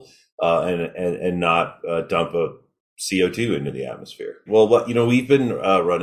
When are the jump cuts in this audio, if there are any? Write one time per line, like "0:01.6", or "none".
0:04.5